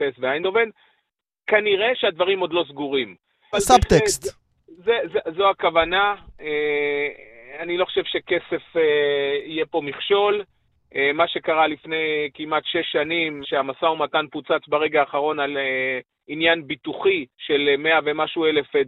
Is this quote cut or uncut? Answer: cut